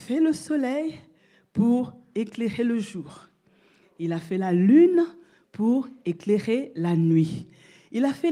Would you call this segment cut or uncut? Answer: uncut